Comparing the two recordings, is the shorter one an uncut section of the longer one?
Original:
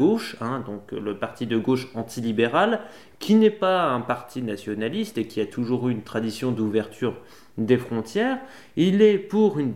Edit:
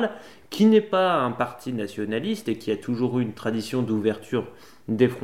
yes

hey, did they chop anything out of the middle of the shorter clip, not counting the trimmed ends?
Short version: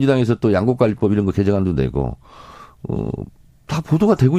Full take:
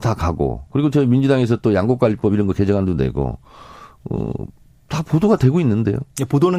no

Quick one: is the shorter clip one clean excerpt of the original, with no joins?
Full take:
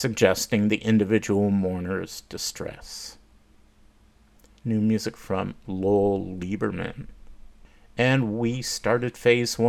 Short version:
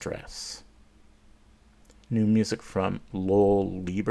yes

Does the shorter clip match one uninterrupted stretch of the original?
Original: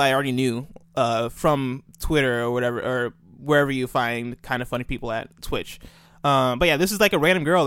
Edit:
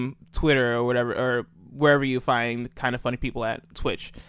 yes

